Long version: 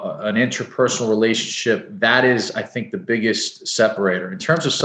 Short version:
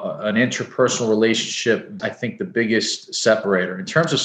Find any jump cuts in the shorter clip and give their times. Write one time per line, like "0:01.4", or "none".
0:02.0